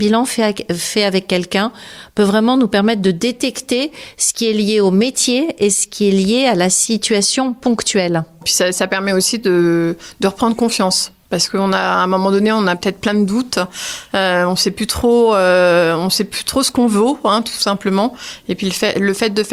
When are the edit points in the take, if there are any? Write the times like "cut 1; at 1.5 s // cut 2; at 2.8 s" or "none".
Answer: cut 1; at 8.4 s